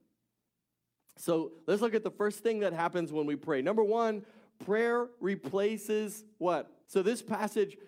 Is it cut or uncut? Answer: cut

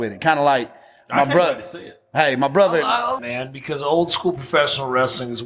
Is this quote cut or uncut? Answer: cut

